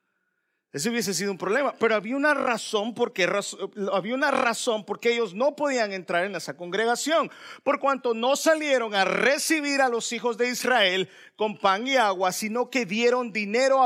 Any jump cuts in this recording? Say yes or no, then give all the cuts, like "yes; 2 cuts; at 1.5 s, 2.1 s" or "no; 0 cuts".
no; 0 cuts